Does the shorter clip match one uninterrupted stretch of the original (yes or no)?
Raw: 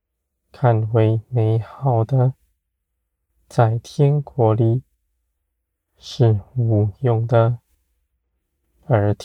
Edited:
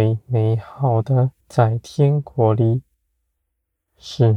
no